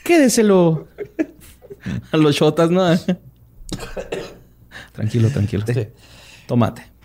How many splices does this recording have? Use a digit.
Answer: 1